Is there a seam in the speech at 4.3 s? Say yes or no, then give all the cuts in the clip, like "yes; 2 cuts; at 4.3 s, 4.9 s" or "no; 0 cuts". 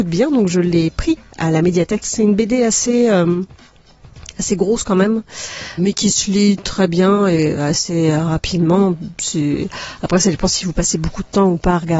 no; 2 cuts; at 2.0 s, 5.8 s